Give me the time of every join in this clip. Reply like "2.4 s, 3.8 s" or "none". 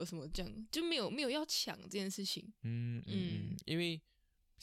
3.1 s